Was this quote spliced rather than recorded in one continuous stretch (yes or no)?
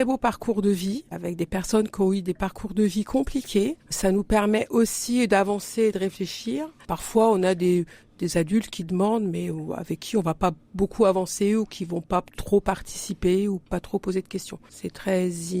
no